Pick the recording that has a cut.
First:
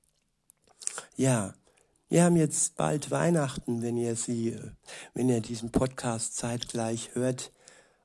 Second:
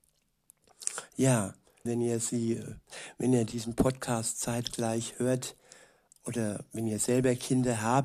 second; 2 cuts; at 1.9 s, 6.2 s

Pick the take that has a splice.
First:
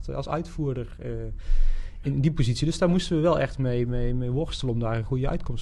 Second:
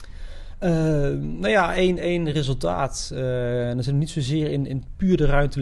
first; 1 cut; at 2.0 s

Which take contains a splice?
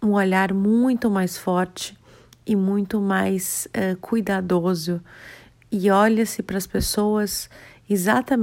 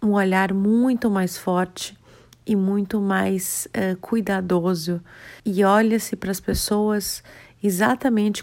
second; 1 cut; at 5.4 s

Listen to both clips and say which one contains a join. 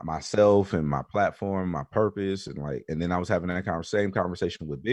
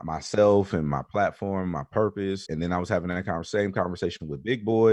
second; 1 cut; at 2.5 s

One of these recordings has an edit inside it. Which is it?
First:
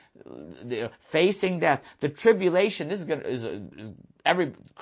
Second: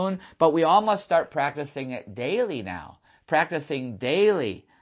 first; 1 cut; at 3.7 s

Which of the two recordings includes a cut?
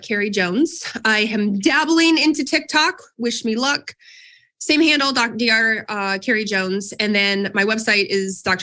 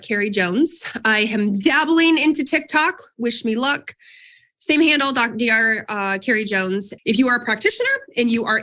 second; 1 cut; at 7.0 s

